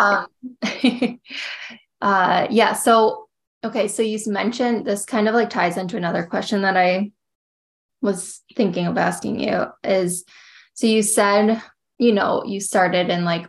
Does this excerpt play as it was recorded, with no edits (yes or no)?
yes